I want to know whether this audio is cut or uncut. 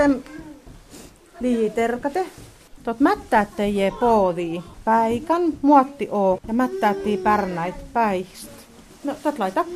cut